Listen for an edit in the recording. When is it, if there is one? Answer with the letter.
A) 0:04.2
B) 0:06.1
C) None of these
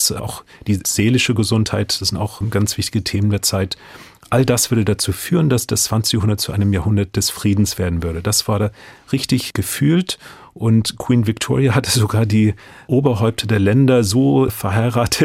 C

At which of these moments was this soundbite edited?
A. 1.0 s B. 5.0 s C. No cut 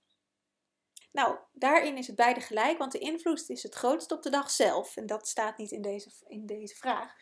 A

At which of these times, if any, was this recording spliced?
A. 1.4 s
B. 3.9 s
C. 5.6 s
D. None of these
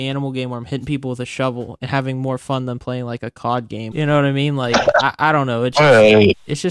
B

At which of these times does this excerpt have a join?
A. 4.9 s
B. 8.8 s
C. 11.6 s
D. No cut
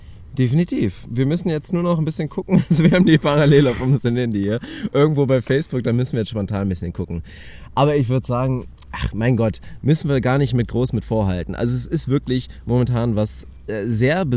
D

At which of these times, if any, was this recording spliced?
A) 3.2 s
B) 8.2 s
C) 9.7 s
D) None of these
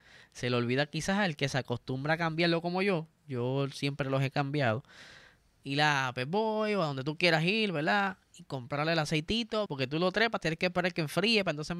C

